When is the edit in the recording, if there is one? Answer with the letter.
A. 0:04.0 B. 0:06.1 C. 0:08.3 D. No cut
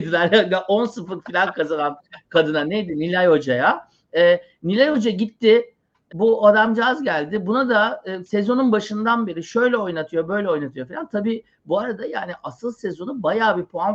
B